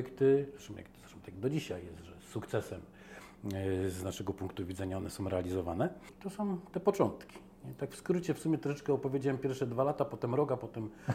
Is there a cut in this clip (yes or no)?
yes